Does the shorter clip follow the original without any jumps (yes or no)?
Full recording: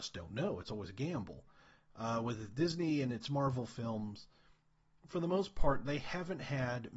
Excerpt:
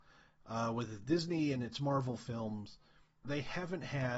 no